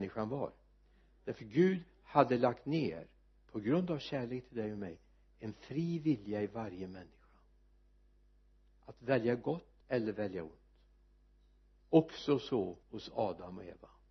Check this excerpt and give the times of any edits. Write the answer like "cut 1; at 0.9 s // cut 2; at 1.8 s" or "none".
cut 1; at 9.8 s // cut 2; at 12.8 s